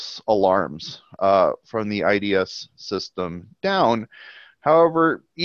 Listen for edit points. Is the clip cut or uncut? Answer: uncut